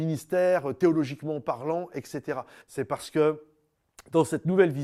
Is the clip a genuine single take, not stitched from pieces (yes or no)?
no